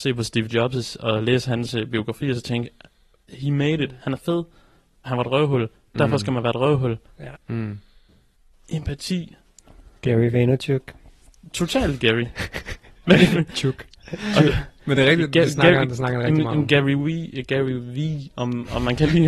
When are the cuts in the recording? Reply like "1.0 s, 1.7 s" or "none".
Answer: 7.4 s